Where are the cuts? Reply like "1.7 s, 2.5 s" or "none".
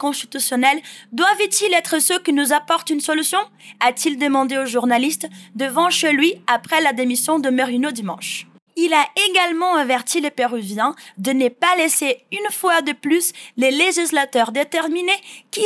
8.7 s